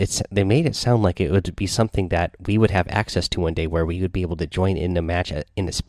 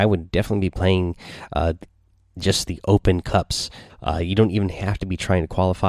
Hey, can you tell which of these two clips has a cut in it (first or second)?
second